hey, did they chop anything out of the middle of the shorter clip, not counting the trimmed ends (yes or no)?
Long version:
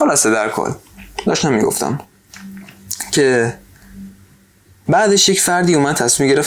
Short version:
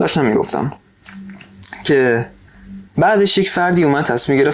yes